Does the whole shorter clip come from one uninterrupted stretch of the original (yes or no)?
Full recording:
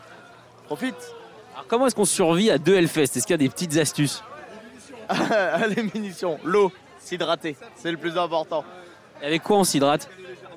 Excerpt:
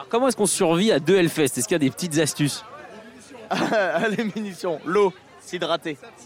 yes